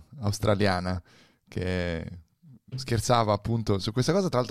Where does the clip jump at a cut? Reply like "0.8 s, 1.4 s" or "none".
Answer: none